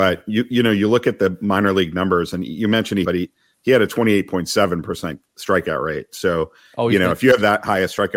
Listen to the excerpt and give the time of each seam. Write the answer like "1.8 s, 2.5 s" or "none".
3.0 s